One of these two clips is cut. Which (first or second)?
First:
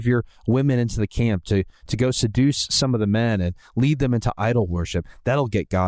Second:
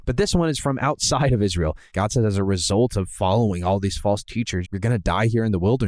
second